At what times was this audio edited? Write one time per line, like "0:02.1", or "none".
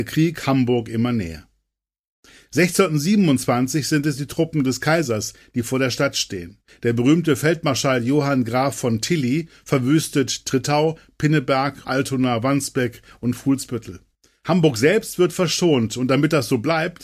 0:11.8